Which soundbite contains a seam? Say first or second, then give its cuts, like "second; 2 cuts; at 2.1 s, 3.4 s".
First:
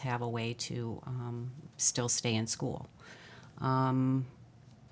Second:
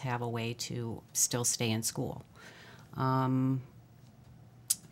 second; 1 cut; at 1.0 s